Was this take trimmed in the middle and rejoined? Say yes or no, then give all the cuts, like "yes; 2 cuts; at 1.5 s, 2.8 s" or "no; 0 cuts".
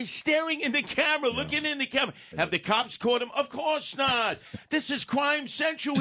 no; 0 cuts